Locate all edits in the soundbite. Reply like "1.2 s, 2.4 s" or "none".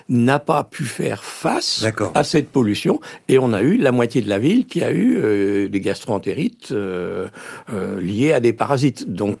none